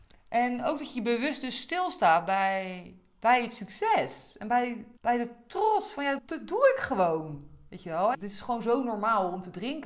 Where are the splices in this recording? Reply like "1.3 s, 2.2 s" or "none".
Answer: 5.0 s, 6.2 s, 8.1 s